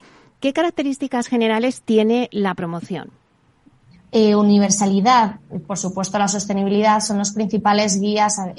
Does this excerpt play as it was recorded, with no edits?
no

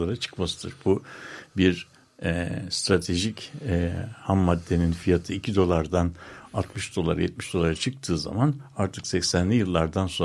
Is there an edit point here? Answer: no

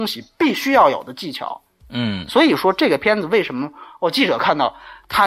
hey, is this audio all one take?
yes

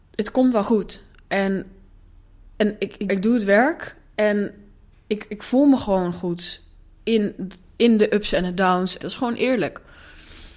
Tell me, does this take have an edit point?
yes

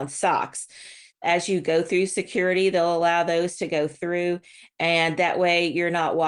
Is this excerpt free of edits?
no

